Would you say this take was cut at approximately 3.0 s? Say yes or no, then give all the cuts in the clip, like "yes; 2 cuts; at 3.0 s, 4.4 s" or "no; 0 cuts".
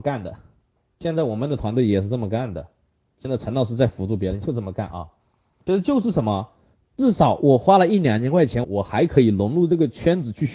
no; 2 cuts; at 6.8 s, 8.6 s